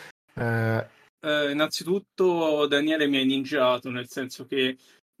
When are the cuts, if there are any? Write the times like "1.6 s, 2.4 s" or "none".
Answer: 1.2 s